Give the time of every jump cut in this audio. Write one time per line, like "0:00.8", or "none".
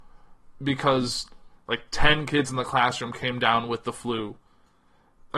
none